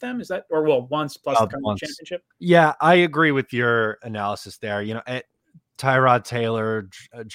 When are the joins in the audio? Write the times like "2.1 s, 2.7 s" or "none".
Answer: 2.3 s